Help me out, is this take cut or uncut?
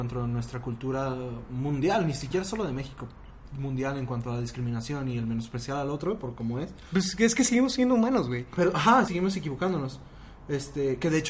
cut